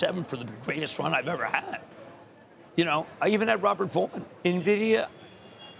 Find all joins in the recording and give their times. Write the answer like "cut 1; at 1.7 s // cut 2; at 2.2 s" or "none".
cut 1; at 4.4 s